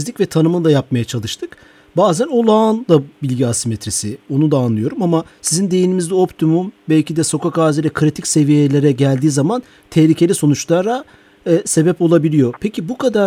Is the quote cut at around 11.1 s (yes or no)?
no